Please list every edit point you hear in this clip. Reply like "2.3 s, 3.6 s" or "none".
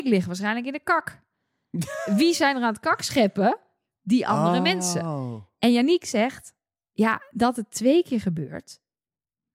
none

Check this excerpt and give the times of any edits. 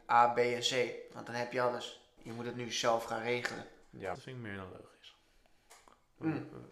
2.2 s, 4.1 s

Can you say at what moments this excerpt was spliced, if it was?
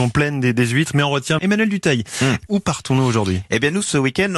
1.4 s, 2.5 s

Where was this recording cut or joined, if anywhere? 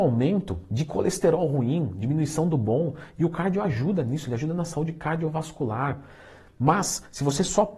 none

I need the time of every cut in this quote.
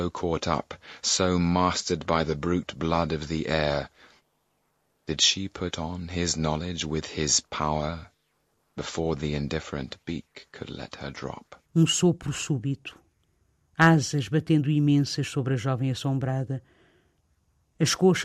11.6 s

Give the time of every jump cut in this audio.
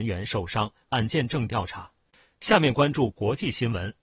none

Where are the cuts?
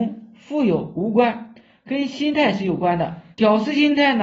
3.3 s

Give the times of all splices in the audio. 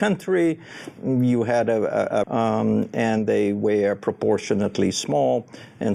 2.2 s

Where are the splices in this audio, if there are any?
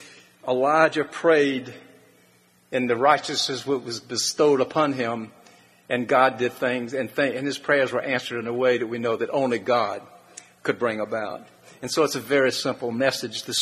none

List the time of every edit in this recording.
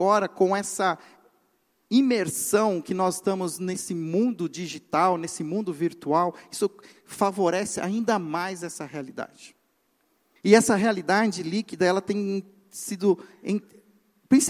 10.4 s

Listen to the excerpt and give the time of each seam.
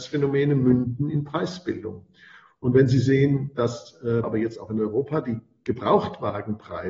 2.5 s, 4.2 s

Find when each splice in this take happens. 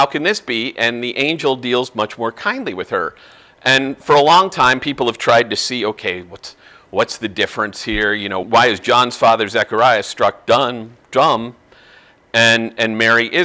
8.4 s

